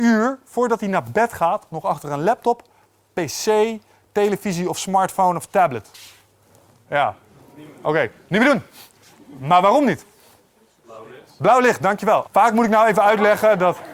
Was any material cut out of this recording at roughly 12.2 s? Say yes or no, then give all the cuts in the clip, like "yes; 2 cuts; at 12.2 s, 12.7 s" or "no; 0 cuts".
yes; 1 cut; at 12.2 s